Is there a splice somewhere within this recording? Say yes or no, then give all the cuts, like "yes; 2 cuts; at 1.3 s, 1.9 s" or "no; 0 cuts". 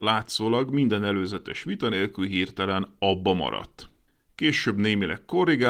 no; 0 cuts